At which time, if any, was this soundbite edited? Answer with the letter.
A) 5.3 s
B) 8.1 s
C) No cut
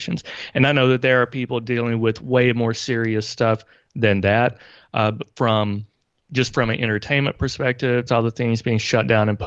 B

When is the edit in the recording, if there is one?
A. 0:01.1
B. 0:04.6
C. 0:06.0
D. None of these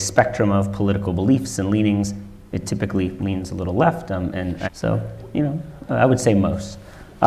B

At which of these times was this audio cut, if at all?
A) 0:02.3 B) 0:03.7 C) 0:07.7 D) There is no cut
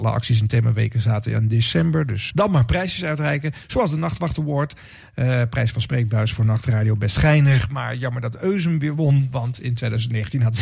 A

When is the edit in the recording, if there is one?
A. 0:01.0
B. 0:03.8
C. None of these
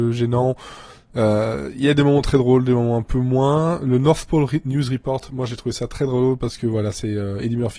C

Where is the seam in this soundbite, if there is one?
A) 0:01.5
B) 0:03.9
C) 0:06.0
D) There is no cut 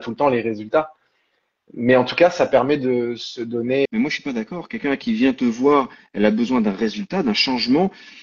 B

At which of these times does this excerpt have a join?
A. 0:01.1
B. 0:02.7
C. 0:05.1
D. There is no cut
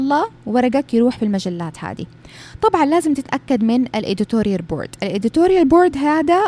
D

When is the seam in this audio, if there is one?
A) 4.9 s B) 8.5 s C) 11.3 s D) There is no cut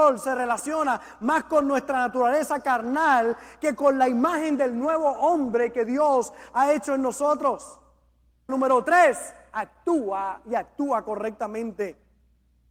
B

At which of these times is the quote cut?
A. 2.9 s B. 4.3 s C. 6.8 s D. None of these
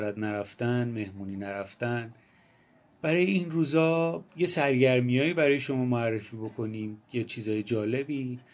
B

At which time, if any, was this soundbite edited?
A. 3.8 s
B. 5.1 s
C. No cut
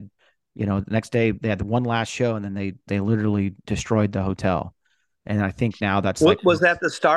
C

